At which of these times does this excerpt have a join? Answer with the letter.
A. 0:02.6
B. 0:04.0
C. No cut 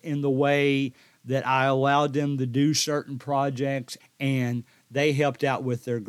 B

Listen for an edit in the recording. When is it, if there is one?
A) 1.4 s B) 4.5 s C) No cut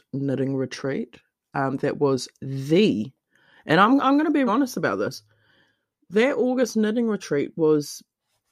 B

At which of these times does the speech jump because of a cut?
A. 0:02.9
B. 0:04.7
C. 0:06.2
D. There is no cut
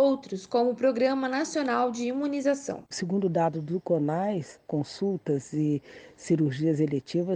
B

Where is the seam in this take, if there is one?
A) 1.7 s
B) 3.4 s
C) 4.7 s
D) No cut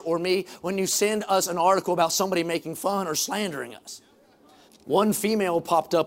C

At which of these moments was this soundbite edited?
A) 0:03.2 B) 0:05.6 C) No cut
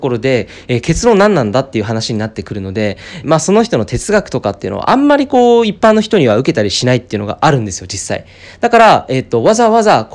A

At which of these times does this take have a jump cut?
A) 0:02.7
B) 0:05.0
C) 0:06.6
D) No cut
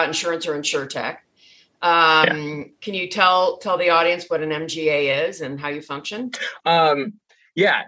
C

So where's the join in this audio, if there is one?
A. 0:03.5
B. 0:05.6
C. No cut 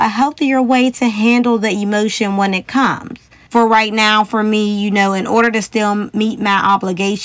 A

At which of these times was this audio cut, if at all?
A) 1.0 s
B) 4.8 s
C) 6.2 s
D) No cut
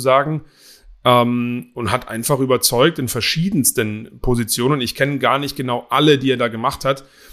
D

